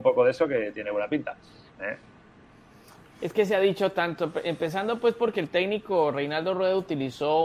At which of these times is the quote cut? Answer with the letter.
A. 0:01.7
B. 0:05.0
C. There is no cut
A